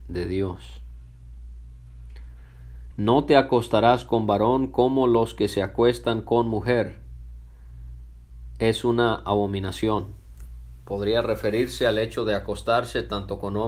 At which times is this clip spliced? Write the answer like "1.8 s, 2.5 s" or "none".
2.9 s